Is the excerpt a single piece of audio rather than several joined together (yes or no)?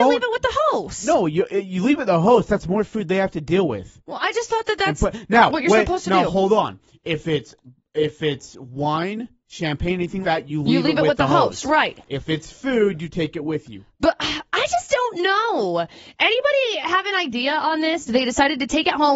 no